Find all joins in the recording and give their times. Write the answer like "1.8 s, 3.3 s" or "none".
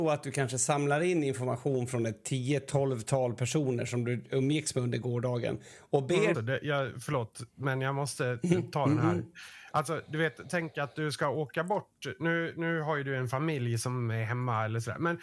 6.3 s